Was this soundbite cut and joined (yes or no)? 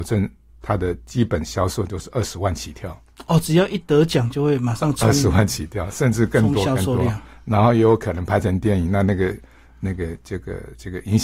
no